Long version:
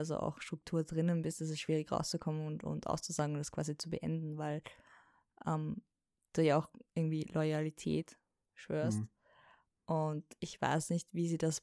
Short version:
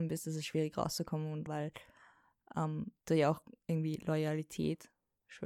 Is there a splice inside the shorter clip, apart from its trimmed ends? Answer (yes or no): yes